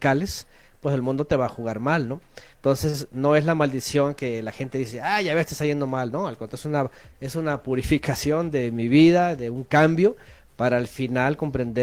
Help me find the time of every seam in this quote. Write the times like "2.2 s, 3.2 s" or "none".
none